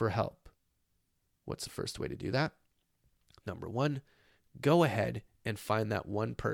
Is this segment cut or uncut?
uncut